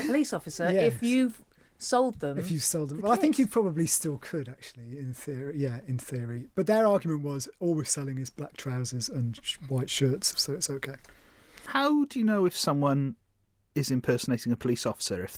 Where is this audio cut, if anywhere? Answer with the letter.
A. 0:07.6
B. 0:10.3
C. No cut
B